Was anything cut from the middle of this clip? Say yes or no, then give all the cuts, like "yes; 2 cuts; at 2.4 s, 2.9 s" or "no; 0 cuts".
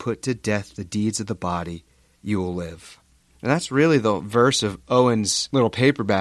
no; 0 cuts